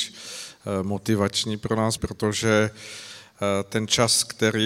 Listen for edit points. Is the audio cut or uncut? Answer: cut